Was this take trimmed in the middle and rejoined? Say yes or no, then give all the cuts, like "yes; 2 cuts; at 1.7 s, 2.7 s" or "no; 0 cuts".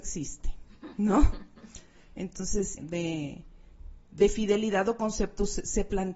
yes; 1 cut; at 2.8 s